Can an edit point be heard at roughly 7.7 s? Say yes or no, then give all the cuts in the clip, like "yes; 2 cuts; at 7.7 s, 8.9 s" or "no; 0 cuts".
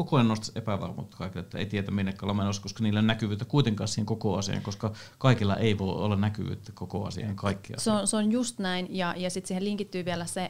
no; 0 cuts